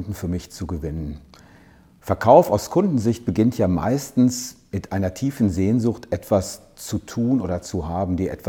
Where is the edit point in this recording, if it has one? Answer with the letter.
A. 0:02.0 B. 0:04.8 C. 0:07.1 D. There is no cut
A